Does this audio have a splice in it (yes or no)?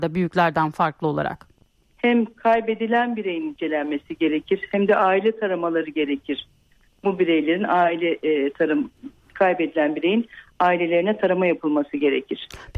yes